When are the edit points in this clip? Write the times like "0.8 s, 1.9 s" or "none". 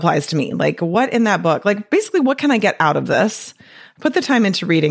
none